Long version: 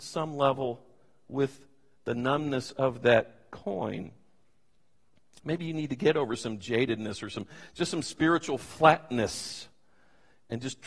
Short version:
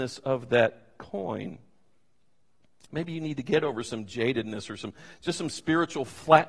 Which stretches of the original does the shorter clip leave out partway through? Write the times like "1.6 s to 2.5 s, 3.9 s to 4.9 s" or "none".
none